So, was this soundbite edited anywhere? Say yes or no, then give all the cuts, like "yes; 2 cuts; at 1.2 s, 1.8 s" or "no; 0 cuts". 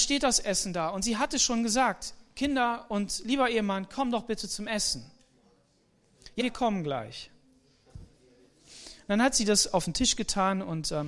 yes; 1 cut; at 6.4 s